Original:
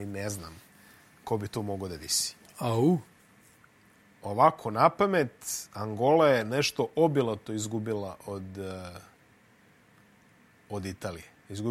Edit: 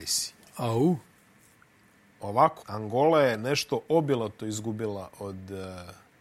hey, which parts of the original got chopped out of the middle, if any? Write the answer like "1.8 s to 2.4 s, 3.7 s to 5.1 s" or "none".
4.6 s to 5.7 s